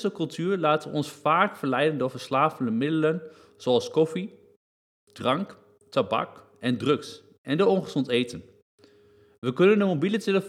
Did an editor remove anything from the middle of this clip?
no; 0 cuts

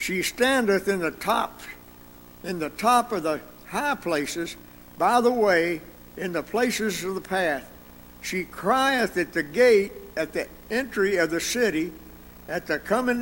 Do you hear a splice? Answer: no; 0 cuts

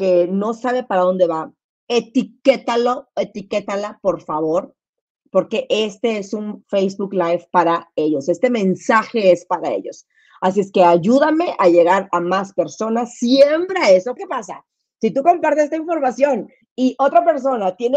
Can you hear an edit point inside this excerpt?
yes; 1 cut; at 14.2 s

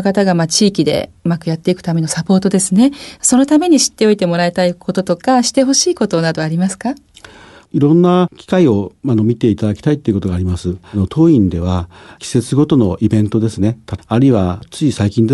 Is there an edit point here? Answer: yes; 1 cut; at 14.0 s

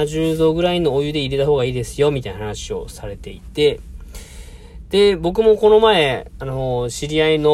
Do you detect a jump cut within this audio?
no; 0 cuts

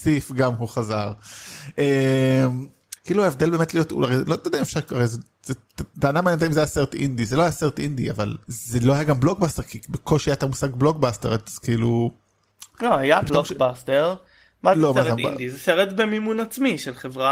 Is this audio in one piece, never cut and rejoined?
no; 2 cuts; at 2.9 s, 8.4 s

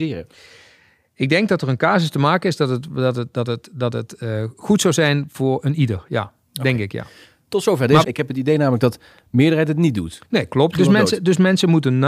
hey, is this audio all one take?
no; 2 cuts; at 8.0 s, 10.7 s

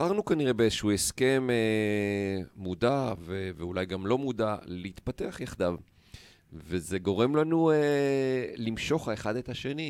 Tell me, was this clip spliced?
no; 0 cuts

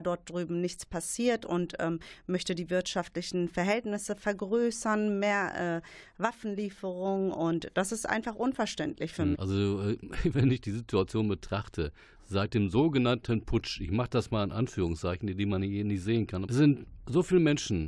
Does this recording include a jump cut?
yes; 2 cuts; at 9.3 s, 16.4 s

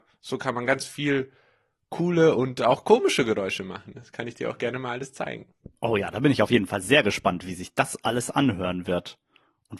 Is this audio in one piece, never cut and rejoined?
yes; 0 cuts

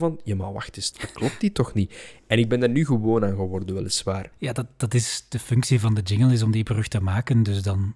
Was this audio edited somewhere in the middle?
yes; 2 cuts; at 0.9 s, 4.3 s

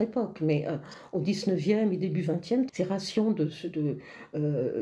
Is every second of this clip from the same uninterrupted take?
no; 1 cut; at 2.7 s

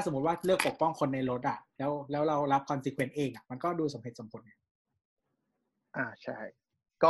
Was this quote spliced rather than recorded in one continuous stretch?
no; 0 cuts

